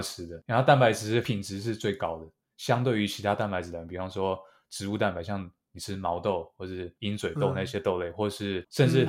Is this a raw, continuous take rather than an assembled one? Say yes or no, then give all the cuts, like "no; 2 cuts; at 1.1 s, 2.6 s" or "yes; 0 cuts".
yes; 0 cuts